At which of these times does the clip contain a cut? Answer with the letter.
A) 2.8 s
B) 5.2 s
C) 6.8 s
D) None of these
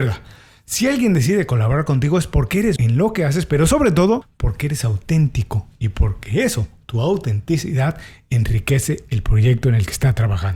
A